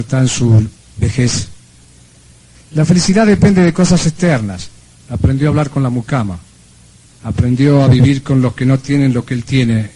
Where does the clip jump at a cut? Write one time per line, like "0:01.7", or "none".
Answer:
0:02.5
0:04.9
0:07.1

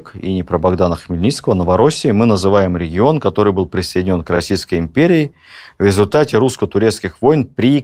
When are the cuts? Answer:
none

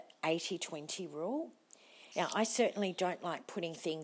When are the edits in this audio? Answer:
0:02.1

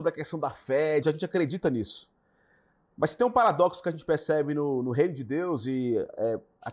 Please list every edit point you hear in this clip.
0:01.0

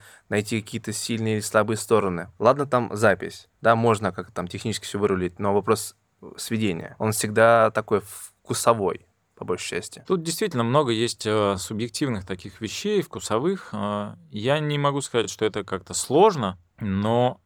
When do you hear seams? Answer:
none

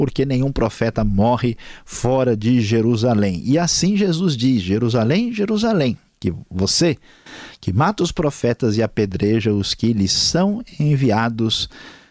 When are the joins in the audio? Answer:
none

